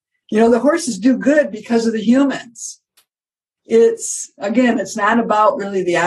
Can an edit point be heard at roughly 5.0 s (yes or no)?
no